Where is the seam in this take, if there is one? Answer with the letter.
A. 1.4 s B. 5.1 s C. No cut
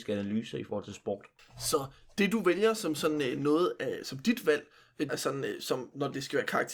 B